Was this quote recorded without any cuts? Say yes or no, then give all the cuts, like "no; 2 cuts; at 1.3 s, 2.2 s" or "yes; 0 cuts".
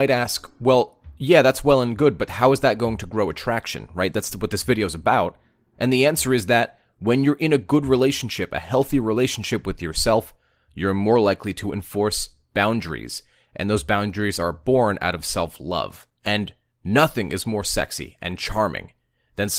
no; 1 cut; at 16.2 s